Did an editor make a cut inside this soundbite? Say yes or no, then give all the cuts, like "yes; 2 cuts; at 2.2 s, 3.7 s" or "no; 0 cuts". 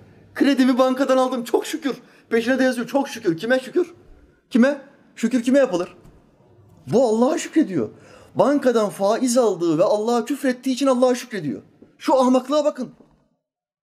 no; 0 cuts